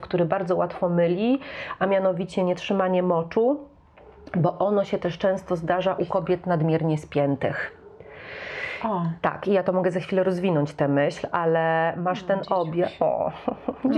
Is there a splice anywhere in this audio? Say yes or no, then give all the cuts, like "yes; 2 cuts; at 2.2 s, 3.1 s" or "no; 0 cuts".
no; 0 cuts